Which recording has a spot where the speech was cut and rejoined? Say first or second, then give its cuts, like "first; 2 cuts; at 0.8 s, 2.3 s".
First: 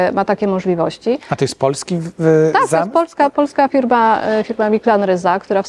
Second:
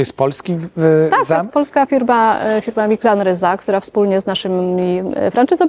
second; 1 cut; at 1.5 s